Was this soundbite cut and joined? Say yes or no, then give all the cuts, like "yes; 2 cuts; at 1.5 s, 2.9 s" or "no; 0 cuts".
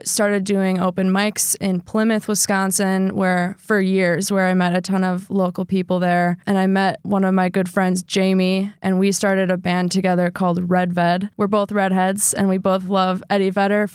no; 0 cuts